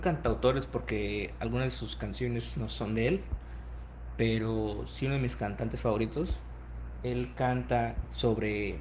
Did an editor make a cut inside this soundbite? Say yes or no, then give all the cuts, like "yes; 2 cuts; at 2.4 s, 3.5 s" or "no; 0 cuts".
yes; 1 cut; at 7.0 s